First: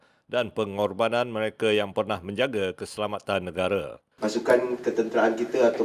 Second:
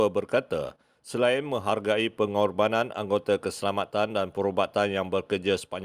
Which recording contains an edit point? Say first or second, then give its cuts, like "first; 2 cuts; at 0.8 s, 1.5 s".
first; 1 cut; at 4.2 s